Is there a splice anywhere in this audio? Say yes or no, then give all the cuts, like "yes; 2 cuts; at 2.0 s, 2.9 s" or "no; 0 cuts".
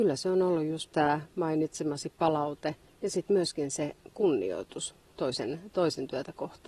no; 0 cuts